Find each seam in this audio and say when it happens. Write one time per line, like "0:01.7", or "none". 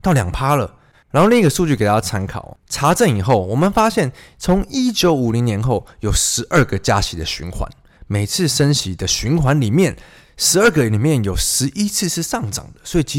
0:00.9